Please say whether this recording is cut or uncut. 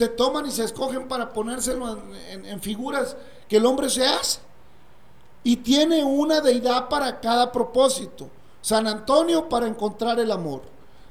uncut